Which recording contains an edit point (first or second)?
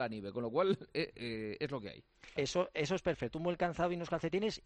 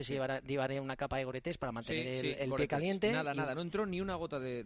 first